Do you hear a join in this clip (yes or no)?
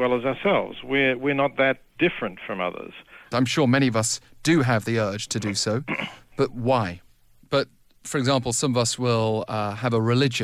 yes